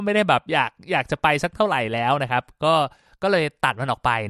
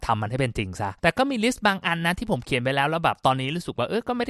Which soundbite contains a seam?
second; 1 cut; at 1.0 s

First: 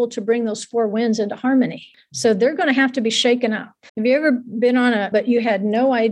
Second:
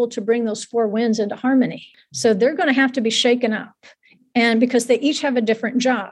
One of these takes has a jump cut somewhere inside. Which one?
first; 2 cuts; at 3.9 s, 5.1 s

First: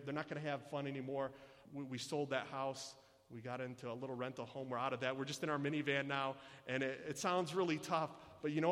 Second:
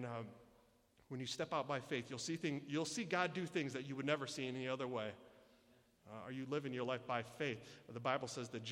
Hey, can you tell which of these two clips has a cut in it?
first; 1 cut; at 1.7 s

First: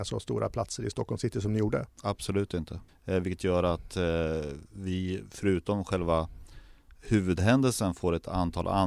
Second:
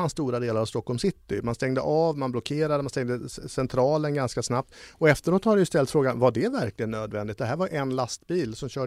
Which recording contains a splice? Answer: first; 1 cut; at 2.9 s

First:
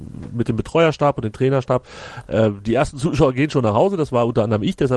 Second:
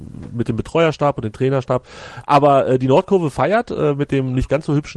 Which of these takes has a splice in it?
second; 1 cut; at 2.2 s

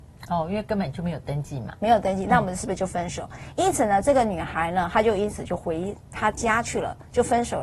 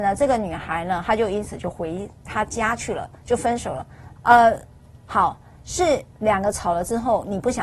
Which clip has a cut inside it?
second; 1 cut; at 4.2 s

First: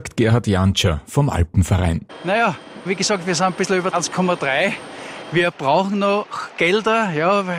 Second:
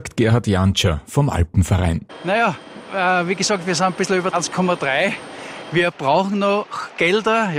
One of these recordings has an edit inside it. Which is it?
first; 1 cut; at 2.9 s

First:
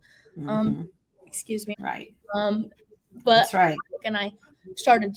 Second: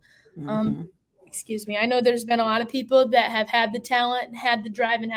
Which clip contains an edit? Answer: first; 2 cuts; at 1.7 s, 4.0 s

